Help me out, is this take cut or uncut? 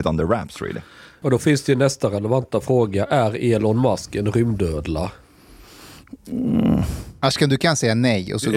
cut